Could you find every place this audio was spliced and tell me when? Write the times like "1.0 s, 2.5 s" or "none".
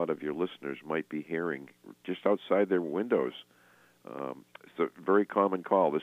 none